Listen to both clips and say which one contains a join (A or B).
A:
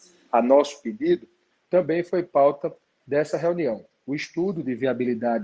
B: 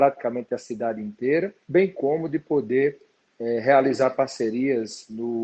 B